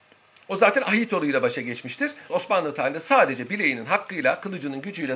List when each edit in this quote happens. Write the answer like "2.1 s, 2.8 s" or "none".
2.3 s